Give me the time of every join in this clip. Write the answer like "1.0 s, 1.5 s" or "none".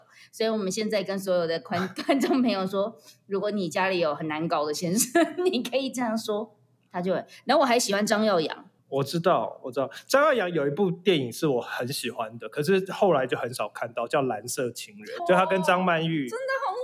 8.8 s, 15.2 s